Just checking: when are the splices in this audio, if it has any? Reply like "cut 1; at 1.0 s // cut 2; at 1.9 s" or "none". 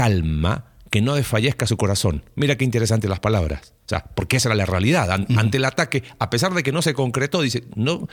none